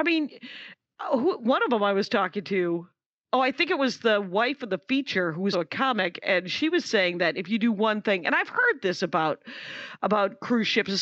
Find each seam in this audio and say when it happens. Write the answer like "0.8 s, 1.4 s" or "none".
5.5 s